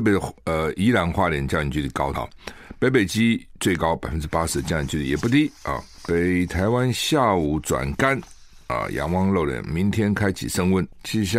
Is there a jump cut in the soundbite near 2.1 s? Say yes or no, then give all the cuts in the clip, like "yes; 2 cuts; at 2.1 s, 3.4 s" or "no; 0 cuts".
yes; 1 cut; at 2.1 s